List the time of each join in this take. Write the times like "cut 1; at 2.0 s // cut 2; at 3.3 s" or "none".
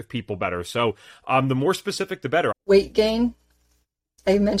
cut 1; at 2.5 s